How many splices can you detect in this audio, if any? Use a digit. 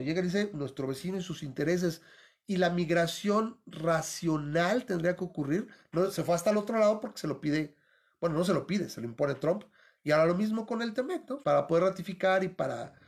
1